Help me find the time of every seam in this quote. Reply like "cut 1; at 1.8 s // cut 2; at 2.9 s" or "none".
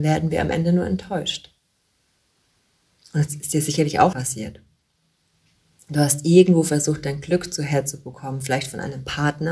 cut 1; at 4.1 s